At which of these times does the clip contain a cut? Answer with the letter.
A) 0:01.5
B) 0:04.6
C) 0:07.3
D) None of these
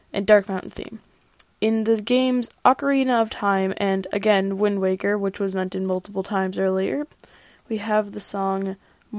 A